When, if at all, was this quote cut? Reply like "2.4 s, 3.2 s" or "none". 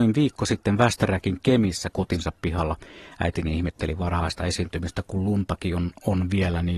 none